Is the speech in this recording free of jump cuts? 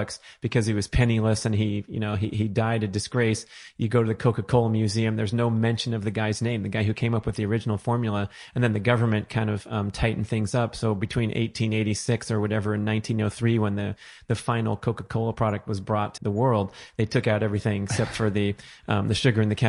no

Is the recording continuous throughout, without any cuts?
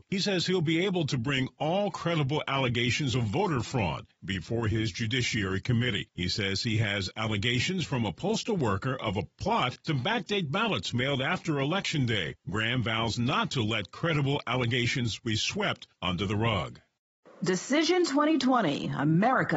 yes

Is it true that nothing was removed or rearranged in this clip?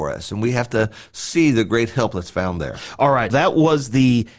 no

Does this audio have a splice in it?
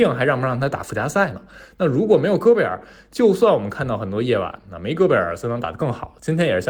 no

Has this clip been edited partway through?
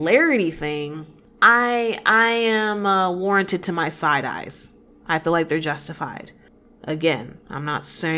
no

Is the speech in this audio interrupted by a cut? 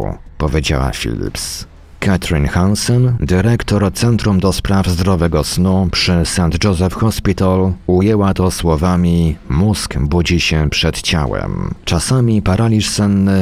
no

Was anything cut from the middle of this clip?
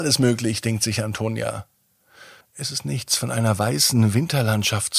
yes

